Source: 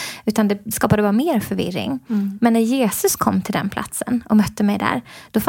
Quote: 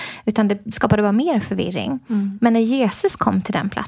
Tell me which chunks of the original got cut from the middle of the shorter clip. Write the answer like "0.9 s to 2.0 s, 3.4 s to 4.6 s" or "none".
none

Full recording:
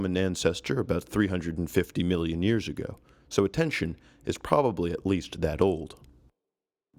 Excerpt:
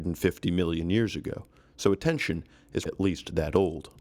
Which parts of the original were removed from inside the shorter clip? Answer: 4.4 s to 4.9 s

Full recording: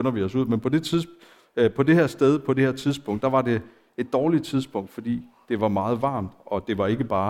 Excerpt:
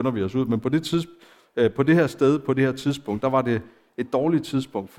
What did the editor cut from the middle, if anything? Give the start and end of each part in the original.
none

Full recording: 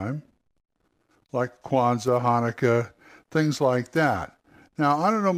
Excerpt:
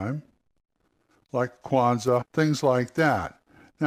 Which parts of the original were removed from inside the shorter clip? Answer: 2.2 s to 3.2 s

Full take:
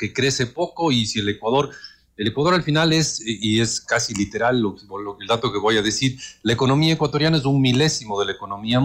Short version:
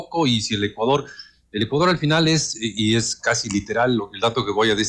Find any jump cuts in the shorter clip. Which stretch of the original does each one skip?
4.6 s to 5.0 s

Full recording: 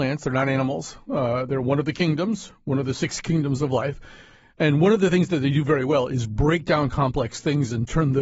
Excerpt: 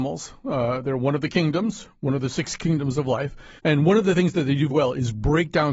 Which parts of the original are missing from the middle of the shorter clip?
4.2 s to 4.5 s, 5.7 s to 5.8 s

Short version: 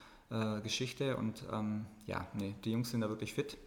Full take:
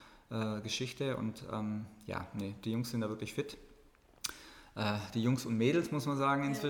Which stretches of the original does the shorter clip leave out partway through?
none

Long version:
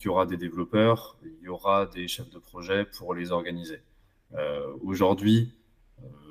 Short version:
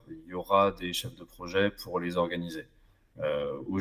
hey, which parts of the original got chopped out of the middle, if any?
none

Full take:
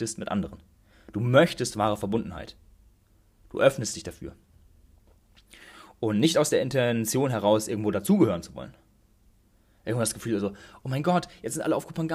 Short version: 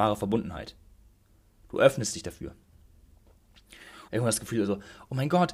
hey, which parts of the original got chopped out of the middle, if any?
5.9 s to 9.8 s

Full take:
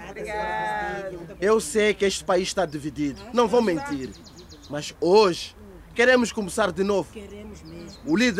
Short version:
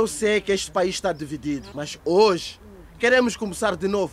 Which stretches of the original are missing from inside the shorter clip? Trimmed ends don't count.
3.2 s to 4.7 s

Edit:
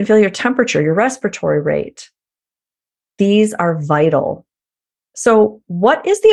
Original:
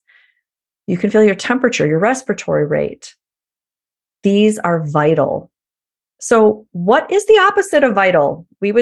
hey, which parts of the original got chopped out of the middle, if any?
none

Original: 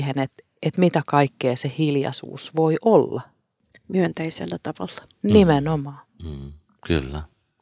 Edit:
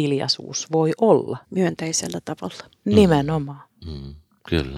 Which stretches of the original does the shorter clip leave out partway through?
3.3 s to 3.8 s

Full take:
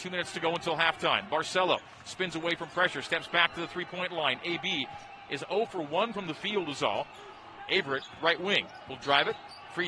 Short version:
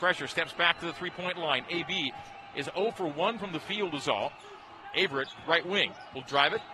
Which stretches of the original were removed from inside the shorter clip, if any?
none

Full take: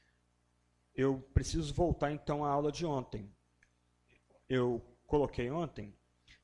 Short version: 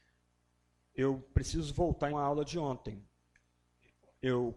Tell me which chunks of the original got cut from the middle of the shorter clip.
2.1 s to 2.4 s

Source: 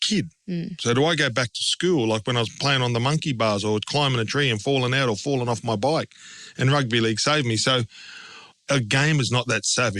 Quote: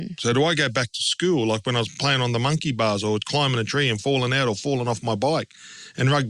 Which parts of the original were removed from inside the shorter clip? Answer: none

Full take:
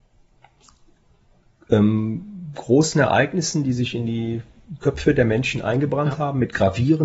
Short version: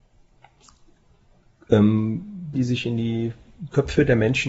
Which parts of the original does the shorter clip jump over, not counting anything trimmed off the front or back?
2.5 s to 3.6 s

